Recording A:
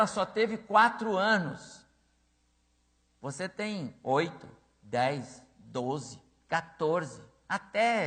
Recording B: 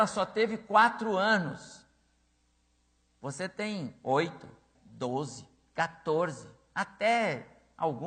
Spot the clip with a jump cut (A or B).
B